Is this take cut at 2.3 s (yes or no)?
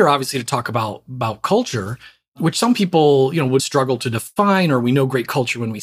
no